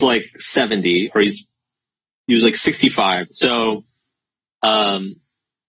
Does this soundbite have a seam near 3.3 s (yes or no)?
yes